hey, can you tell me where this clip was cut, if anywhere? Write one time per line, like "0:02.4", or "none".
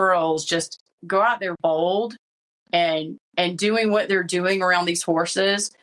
0:01.6
0:03.2